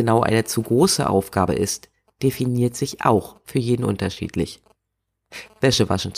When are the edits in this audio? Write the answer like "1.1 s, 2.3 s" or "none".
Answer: none